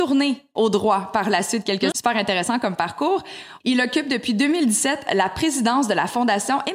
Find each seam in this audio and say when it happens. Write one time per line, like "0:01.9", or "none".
0:01.9
0:03.6